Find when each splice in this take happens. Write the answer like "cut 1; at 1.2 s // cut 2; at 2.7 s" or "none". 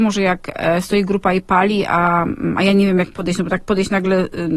none